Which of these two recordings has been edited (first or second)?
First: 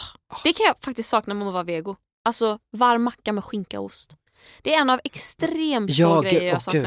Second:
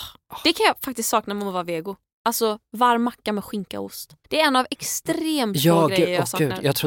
second